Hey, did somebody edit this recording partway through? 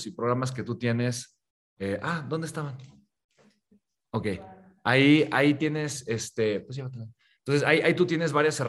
no; 0 cuts

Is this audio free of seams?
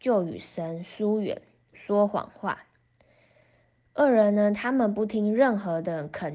no; 1 cut; at 1.7 s

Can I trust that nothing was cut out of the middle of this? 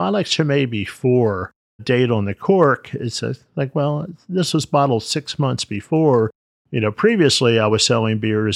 no; 1 cut; at 1.8 s

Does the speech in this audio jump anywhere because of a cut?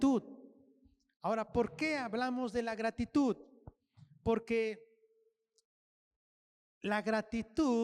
no; 0 cuts

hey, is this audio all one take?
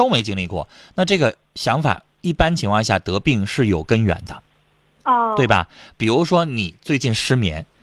yes; 0 cuts

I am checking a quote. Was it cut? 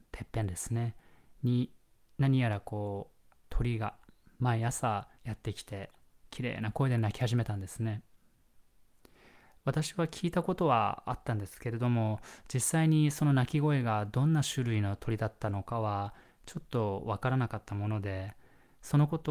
yes; 2 cuts; at 3.4 s, 5.2 s

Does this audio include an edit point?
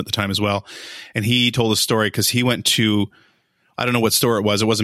no; 0 cuts

